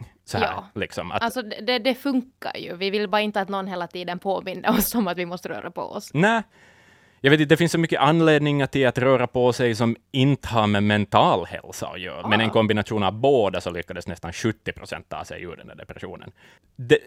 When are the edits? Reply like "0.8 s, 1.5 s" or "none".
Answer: 12.2 s